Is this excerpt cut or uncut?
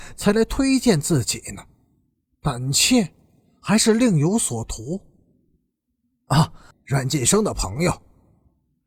cut